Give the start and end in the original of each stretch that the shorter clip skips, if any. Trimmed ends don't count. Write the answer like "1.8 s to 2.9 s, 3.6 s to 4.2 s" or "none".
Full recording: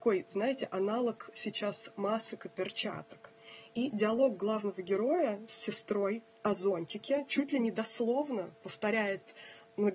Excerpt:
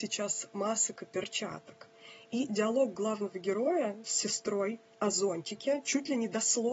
none